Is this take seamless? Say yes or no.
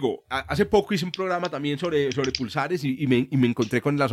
yes